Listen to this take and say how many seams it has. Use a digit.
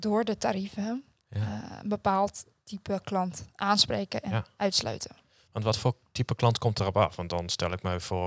0